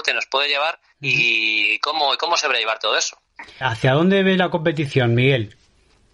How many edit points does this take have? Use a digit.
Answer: 1